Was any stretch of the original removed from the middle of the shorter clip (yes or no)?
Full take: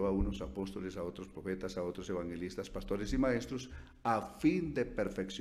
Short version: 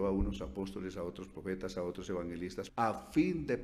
yes